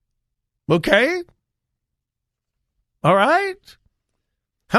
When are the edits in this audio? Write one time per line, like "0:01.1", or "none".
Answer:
none

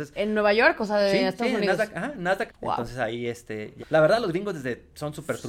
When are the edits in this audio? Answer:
0:02.5
0:03.8

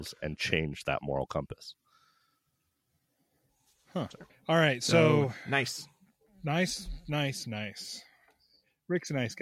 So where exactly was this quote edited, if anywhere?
0:04.3

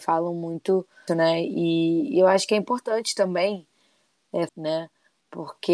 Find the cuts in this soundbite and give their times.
0:01.1
0:04.5

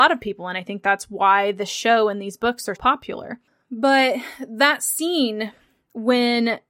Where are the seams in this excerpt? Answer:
0:02.7

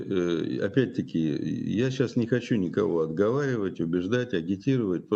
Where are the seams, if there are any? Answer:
none

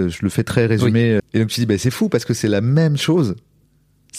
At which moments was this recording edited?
0:01.2

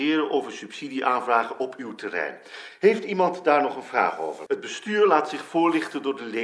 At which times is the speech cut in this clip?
0:04.5

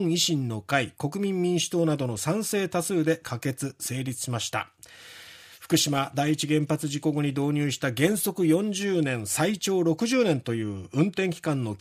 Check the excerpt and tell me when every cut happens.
none

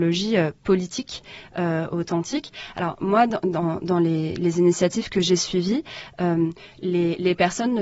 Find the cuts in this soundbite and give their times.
none

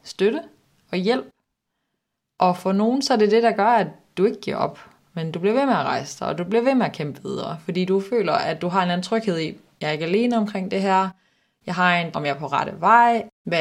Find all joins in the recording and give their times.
0:12.1

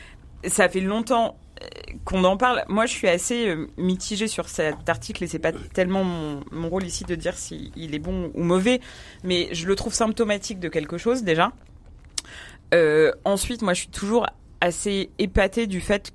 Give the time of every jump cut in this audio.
none

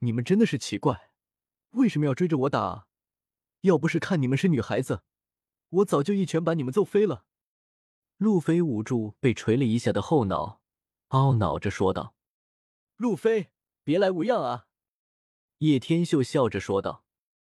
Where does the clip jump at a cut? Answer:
0:13.7

